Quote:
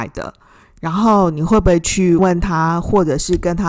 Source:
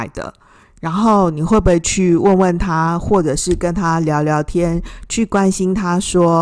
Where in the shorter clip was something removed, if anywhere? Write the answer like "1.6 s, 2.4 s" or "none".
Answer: 2.2 s